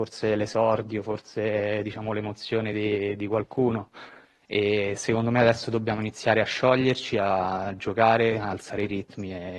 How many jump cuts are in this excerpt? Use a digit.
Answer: 0